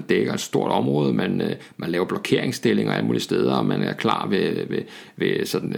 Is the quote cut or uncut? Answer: uncut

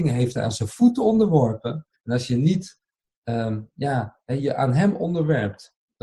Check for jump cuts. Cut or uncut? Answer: cut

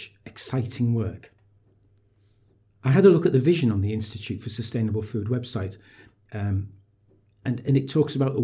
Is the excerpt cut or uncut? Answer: uncut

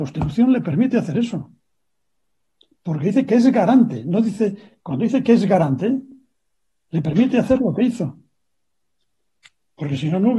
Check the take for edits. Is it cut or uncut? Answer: uncut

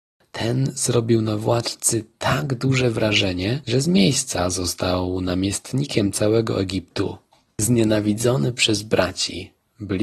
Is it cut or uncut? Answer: cut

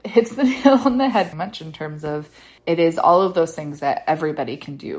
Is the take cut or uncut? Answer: cut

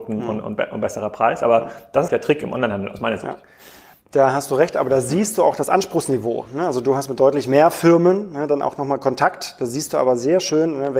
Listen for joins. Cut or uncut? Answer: cut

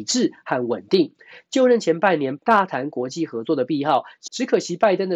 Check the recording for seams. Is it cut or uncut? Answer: cut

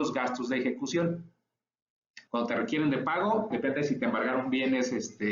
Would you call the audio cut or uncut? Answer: cut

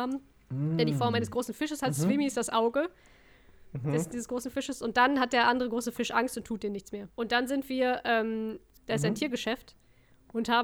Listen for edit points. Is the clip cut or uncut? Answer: cut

